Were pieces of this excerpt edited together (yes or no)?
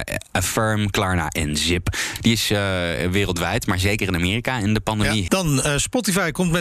yes